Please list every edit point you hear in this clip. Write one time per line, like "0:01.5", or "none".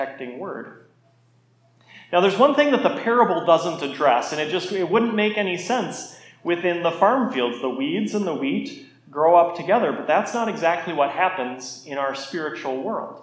none